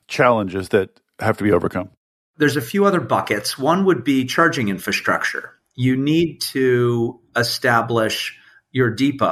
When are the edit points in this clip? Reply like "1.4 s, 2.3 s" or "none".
none